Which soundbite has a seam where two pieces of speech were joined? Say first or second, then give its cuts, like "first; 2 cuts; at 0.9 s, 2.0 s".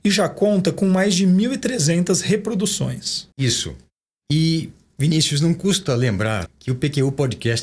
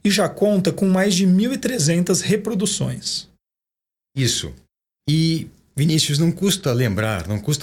first; 2 cuts; at 3.3 s, 6.5 s